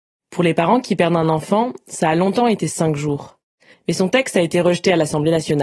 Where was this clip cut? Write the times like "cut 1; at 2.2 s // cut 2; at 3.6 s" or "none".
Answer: cut 1; at 3.7 s